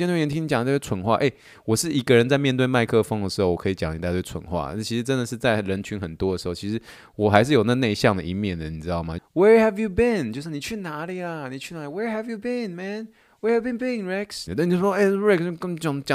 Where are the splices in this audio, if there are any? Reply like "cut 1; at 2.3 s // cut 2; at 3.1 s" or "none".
cut 1; at 9.2 s // cut 2; at 14.5 s